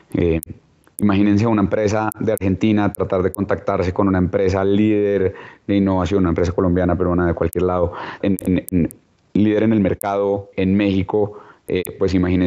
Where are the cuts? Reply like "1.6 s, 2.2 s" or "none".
8.2 s, 10.5 s